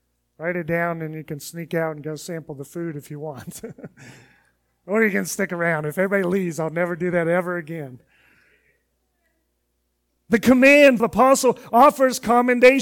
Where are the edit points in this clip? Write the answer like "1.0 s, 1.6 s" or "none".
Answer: 11.0 s